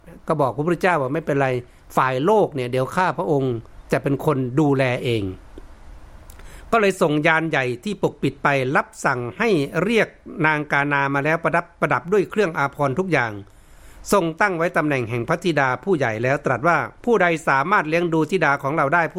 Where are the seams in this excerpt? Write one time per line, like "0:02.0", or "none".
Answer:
0:17.0